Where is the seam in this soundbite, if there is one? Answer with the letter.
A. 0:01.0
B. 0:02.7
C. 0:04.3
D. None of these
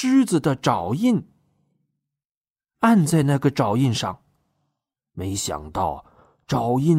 B